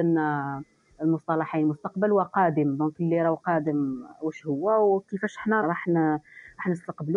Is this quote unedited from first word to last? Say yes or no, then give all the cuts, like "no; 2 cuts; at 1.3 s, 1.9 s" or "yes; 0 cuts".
no; 1 cut; at 5.6 s